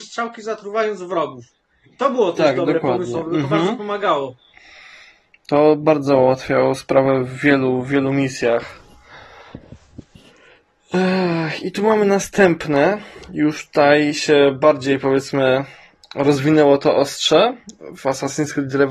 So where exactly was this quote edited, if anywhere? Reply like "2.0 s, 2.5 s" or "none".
none